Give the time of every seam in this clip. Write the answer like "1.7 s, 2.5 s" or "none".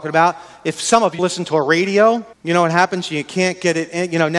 1.2 s, 2.3 s